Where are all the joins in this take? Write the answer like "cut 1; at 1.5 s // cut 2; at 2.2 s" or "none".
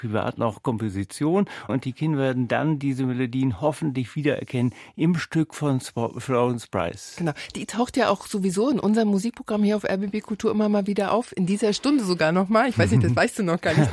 cut 1; at 1.7 s